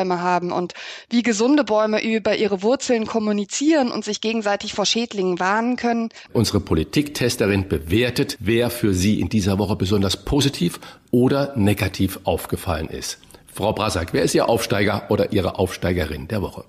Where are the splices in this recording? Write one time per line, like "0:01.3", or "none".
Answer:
0:06.3